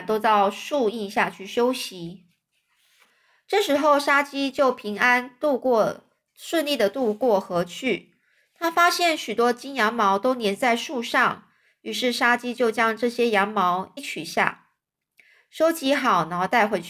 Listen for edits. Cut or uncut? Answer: cut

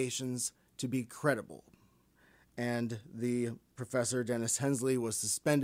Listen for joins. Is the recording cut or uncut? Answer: uncut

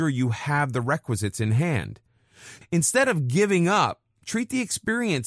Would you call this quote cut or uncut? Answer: cut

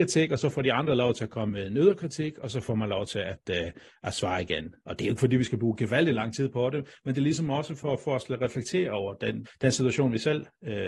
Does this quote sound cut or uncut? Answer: cut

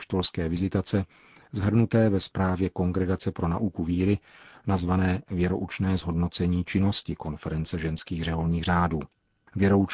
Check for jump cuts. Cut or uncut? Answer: uncut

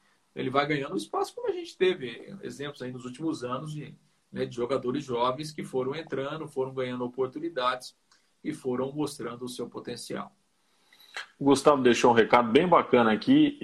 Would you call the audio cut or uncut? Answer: uncut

